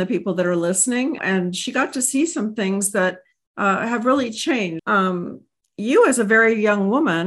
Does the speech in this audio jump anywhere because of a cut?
yes; 2 cuts; at 1.2 s, 4.8 s

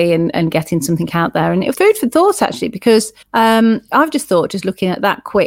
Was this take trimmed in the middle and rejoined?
yes; 2 cuts; at 1.7 s, 3.2 s

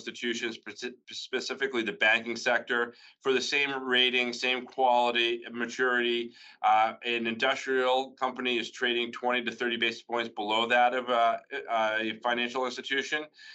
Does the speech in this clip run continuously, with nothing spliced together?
yes; 0 cuts

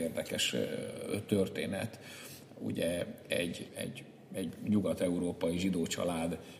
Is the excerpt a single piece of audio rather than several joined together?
no; 1 cut; at 3.7 s

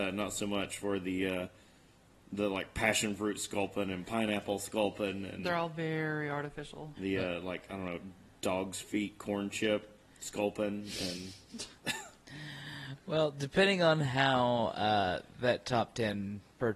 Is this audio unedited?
no; 2 cuts; at 7.0 s, 11.8 s

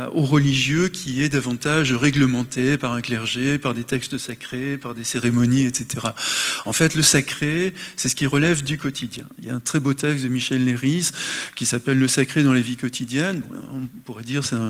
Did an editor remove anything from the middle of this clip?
no; 0 cuts

